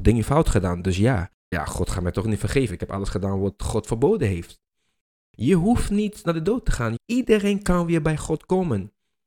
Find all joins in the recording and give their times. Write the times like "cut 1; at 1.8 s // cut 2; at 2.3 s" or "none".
cut 1; at 1.5 s // cut 2; at 5.1 s // cut 3; at 7.0 s